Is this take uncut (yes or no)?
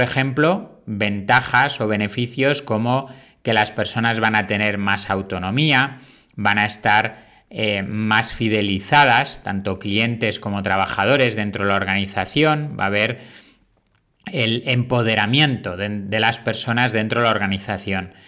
yes